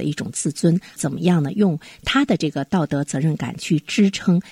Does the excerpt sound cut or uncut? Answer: uncut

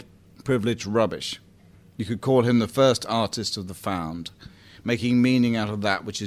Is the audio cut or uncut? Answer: uncut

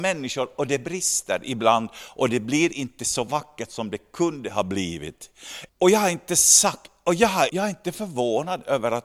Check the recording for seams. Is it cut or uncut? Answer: cut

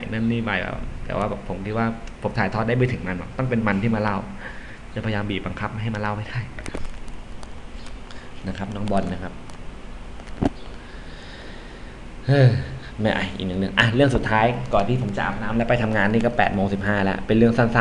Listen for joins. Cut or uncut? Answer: uncut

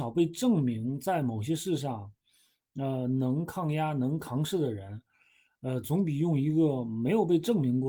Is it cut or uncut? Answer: uncut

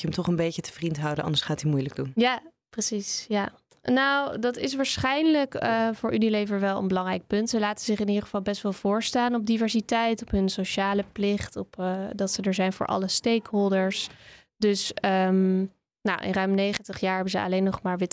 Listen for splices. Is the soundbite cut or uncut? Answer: cut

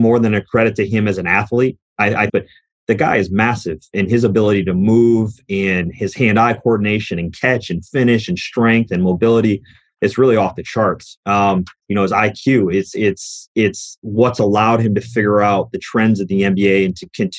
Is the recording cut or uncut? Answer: cut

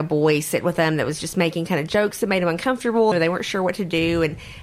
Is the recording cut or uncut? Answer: cut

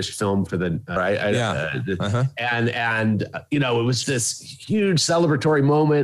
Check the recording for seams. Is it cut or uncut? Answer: cut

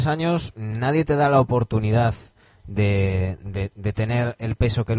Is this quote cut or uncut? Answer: uncut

